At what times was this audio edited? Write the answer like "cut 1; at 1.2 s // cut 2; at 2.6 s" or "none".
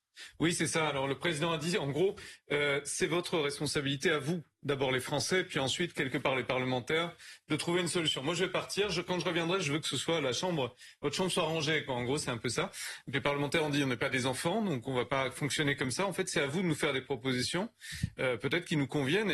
none